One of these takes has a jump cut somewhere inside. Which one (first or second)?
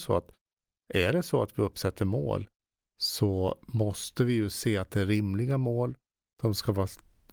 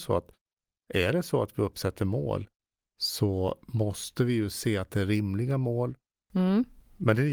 second